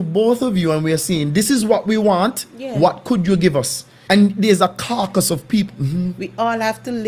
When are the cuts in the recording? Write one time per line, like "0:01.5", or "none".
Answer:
0:04.1
0:05.7